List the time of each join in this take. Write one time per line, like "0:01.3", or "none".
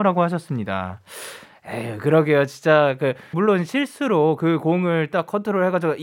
0:03.3